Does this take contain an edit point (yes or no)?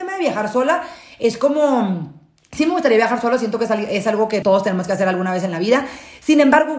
yes